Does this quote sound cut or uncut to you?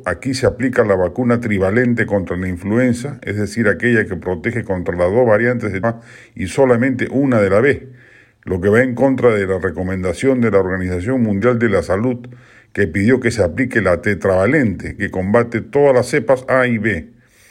cut